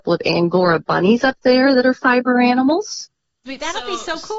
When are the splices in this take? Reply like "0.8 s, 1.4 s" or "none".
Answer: 3.5 s

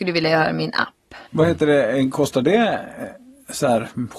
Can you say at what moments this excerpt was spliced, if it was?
1.3 s

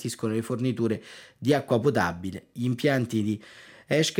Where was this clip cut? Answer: none

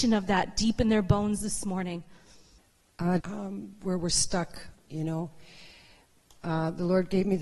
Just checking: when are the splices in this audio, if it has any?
3.2 s, 4.7 s

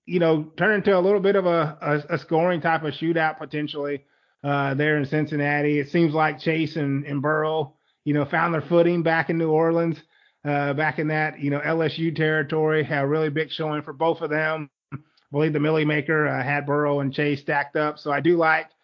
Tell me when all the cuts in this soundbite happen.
none

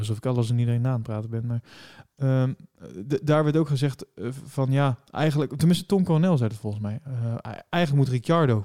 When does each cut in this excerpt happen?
none

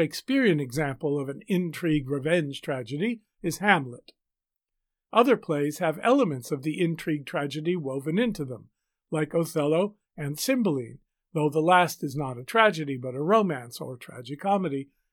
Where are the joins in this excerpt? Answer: 10.1 s

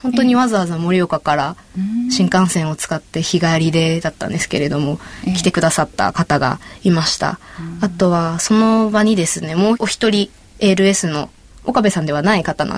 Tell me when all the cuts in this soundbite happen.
none

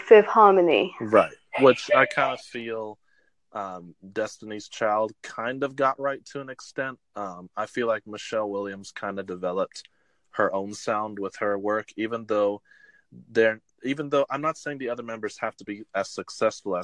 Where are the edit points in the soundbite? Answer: none

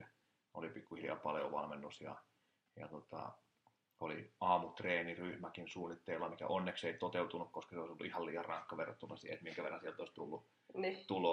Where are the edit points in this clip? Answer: none

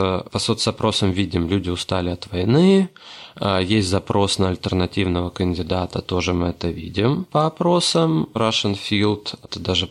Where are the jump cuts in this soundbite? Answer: none

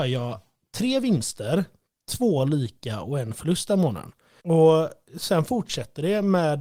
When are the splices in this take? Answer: 4.4 s

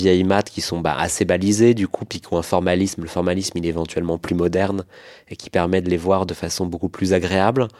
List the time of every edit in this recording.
none

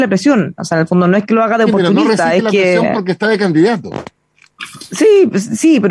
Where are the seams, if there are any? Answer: none

